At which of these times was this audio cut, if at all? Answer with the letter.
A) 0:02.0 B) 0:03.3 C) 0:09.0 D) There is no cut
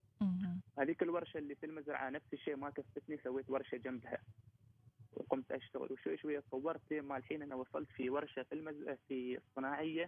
D